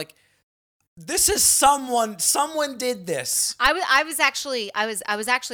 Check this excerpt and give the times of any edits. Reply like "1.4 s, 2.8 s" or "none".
none